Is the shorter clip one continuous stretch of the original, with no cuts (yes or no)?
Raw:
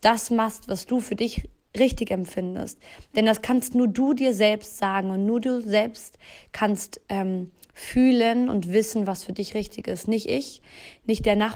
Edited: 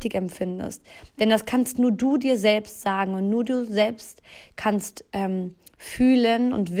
yes